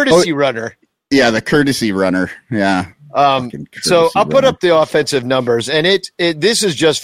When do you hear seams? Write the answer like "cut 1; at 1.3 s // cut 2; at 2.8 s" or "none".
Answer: none